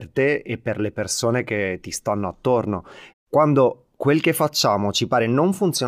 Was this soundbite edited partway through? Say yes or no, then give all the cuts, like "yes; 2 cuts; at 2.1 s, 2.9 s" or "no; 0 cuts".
yes; 1 cut; at 3.1 s